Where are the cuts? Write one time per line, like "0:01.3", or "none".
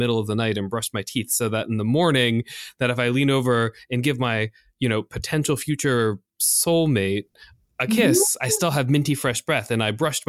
none